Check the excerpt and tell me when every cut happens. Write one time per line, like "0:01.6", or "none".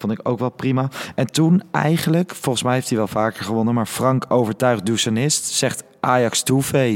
none